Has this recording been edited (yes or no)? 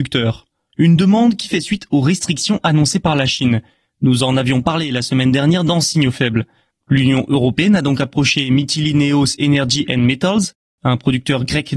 yes